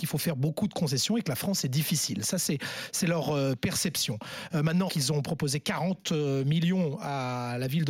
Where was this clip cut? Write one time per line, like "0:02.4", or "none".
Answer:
0:04.9